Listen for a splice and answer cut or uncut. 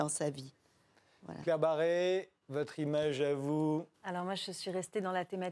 cut